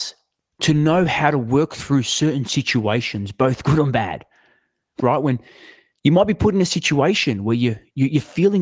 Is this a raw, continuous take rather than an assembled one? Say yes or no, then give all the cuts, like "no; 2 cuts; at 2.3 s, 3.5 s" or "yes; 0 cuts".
no; 1 cut; at 5.0 s